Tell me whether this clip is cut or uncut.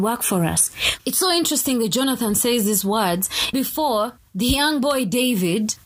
cut